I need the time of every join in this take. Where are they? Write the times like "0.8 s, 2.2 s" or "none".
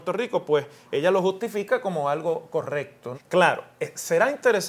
3.1 s